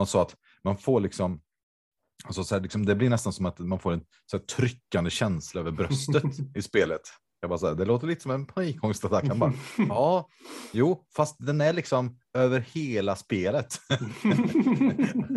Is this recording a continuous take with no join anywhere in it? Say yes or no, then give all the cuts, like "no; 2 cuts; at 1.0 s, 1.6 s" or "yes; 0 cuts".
yes; 0 cuts